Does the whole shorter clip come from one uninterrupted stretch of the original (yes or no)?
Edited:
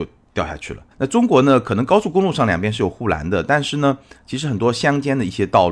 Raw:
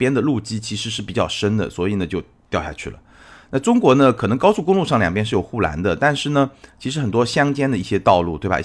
no